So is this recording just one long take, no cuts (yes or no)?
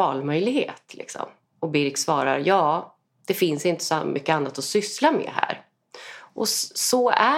no